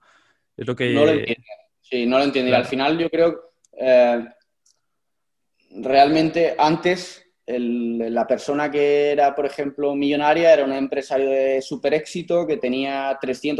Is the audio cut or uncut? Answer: uncut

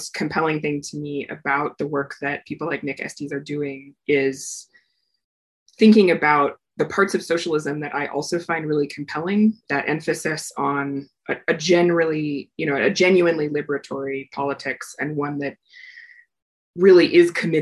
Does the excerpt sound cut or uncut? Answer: cut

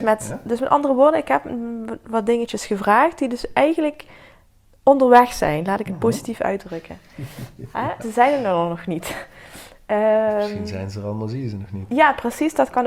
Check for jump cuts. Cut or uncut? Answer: cut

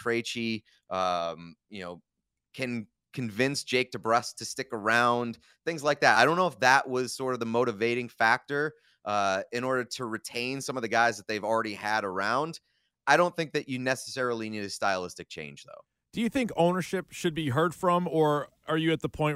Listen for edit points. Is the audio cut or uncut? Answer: uncut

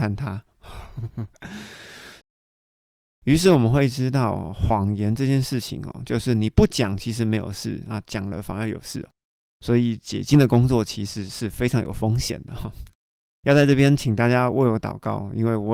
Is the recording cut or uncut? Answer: uncut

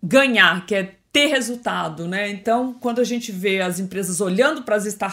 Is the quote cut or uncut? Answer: uncut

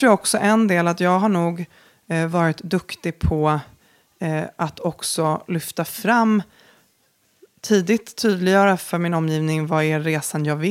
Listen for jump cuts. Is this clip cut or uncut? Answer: uncut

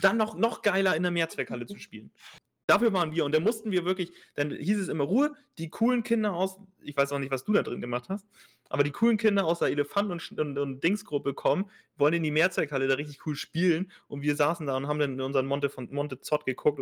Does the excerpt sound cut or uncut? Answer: uncut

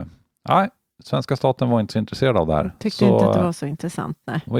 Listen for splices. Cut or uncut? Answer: uncut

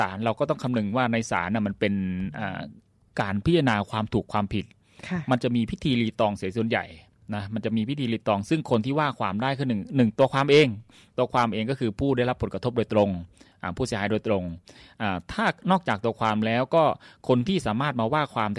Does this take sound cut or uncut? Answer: uncut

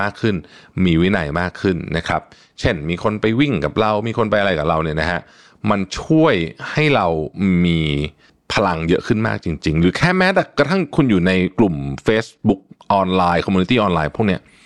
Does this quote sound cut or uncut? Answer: uncut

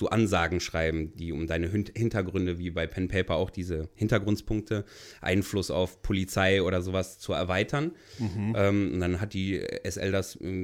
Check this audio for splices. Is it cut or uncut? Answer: uncut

